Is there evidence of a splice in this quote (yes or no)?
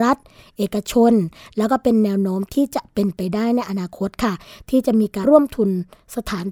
yes